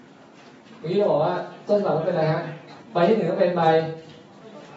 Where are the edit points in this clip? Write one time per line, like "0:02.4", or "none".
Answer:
0:02.8